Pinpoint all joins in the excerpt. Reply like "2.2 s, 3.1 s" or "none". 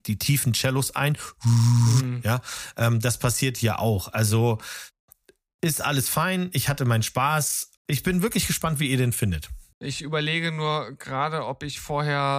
7.8 s, 9.7 s